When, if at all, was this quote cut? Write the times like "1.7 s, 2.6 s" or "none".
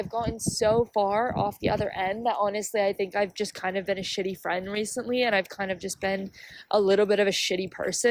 none